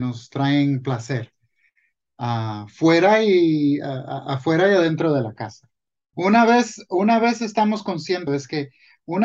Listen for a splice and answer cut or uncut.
cut